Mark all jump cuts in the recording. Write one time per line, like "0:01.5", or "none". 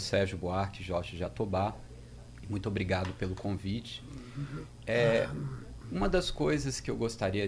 none